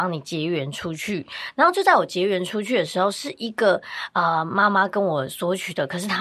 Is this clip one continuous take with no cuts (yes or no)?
yes